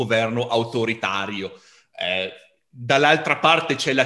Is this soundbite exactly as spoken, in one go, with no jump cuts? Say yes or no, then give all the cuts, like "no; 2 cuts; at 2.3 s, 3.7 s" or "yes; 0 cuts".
yes; 0 cuts